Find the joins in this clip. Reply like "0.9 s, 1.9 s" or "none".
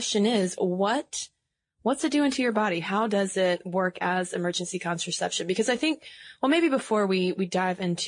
none